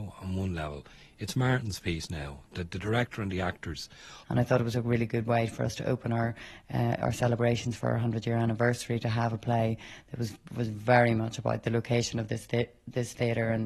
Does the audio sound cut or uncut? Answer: cut